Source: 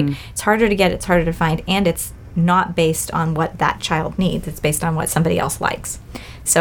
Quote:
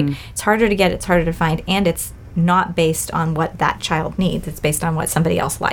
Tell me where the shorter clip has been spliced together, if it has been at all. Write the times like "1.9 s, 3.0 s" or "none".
none